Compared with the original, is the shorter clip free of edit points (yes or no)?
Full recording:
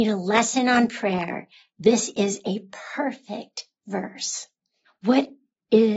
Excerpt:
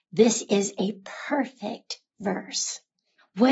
yes